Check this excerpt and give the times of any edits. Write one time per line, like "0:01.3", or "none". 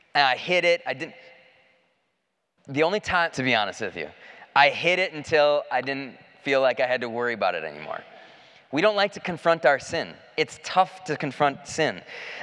0:03.3